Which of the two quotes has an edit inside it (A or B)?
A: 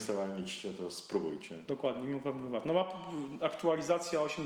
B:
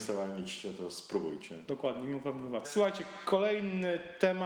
B